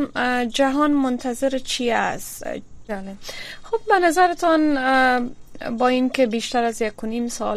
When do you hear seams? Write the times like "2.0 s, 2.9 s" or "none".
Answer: 2.9 s